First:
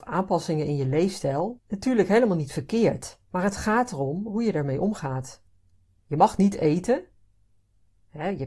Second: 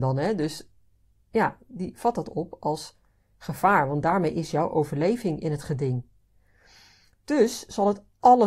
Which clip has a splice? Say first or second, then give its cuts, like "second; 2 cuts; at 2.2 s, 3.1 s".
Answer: first; 3 cuts; at 1.6 s, 3.2 s, 6.0 s